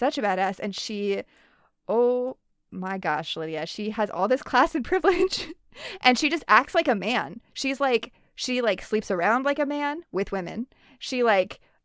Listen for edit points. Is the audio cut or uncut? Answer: uncut